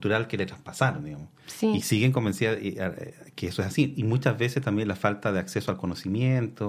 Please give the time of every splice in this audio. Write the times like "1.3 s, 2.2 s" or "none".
3.9 s